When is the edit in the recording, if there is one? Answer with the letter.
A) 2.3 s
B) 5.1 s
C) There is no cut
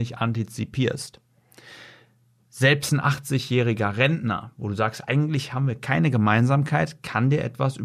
C